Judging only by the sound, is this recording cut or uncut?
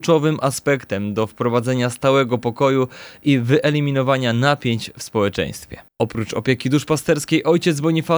cut